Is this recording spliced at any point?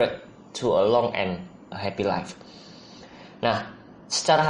no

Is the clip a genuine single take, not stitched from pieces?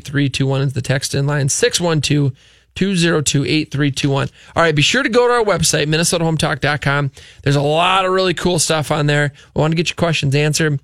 no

